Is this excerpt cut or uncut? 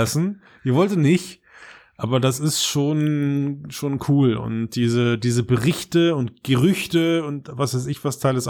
uncut